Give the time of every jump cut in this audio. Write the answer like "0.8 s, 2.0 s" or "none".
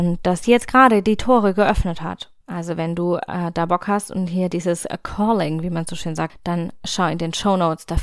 2.4 s, 6.3 s